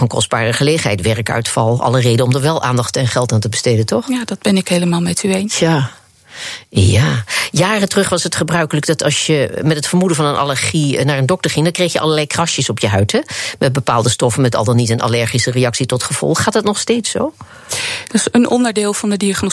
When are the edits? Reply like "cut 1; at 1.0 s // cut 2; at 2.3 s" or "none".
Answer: none